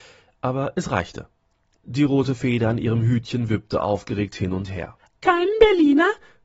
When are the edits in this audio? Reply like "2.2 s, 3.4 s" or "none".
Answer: 1.7 s, 5.1 s